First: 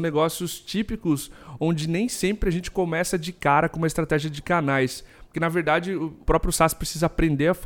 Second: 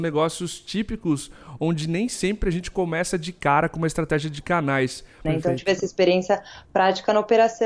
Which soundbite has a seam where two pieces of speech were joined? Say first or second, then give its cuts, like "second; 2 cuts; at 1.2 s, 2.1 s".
second; 1 cut; at 5.3 s